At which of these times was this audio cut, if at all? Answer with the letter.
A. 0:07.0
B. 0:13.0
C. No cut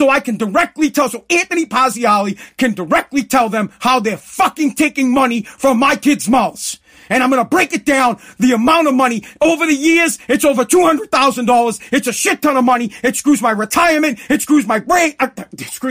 C